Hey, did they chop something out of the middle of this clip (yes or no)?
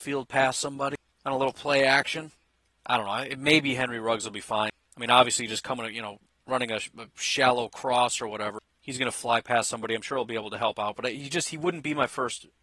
no